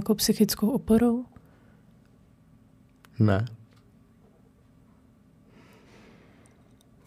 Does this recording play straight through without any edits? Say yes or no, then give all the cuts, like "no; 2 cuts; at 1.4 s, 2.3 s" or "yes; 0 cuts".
yes; 0 cuts